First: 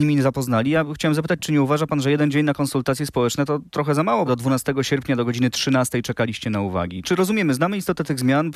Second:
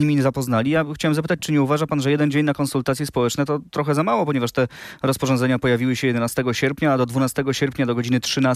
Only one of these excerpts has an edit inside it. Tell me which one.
first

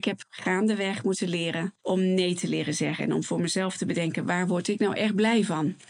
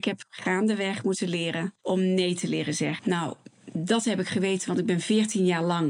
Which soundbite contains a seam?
second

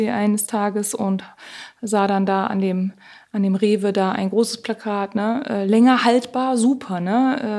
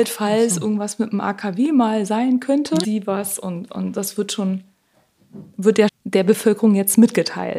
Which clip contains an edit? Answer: second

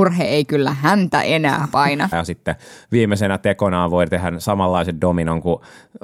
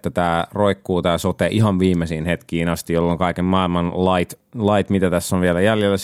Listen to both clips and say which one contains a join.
first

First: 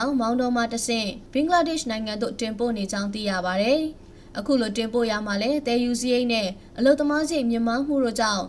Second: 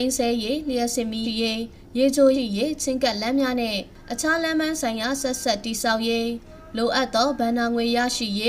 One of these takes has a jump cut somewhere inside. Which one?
second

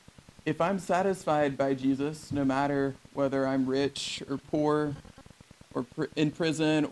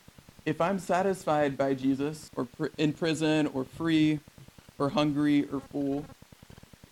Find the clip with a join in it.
second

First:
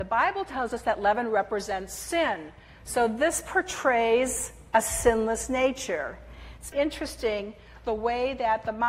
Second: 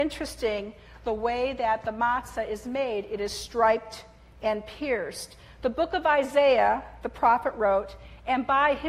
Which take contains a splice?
first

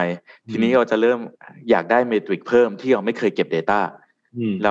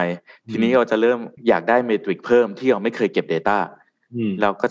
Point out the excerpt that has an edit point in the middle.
second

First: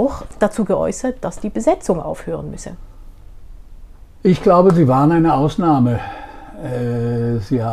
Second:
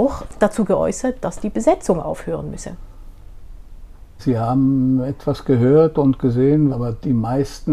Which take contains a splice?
second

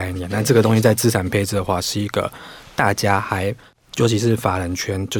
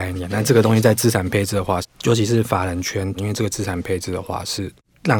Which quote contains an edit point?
second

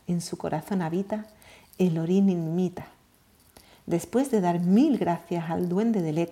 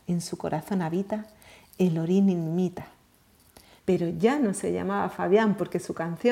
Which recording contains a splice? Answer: second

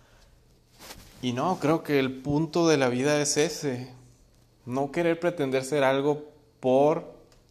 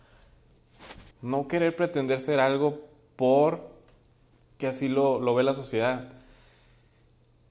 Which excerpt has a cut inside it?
second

